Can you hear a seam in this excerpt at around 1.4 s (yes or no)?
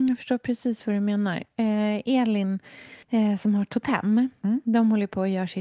no